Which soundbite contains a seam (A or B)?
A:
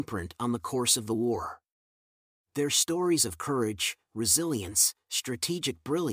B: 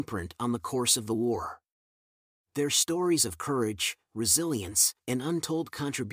B